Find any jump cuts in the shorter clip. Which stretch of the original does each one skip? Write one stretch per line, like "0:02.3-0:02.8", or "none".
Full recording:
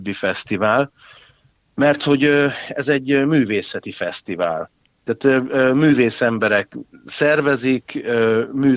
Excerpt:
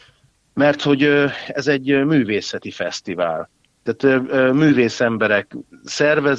none

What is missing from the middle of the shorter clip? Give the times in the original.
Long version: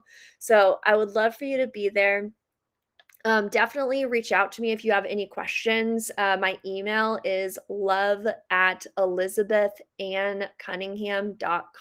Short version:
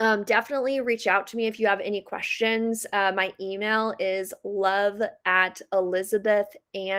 none

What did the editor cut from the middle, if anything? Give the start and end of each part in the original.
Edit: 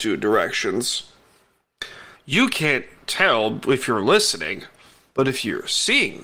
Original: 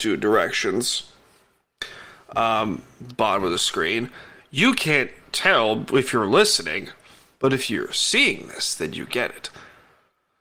0:02.1-0:04.4

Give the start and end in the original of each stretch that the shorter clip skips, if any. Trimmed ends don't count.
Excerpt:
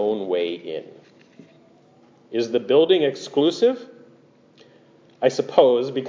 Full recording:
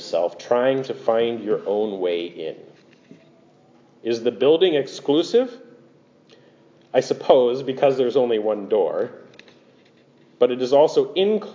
none

